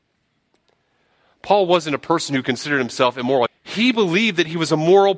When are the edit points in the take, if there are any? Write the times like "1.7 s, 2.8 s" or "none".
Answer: 3.5 s